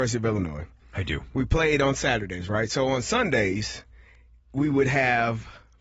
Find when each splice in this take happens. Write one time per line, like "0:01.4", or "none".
none